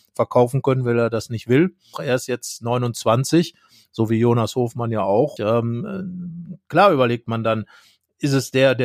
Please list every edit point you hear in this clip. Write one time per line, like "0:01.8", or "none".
0:01.9
0:05.4